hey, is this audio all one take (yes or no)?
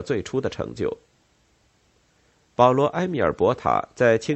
yes